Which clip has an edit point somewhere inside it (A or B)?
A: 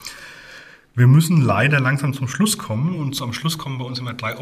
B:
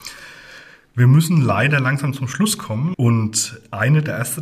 B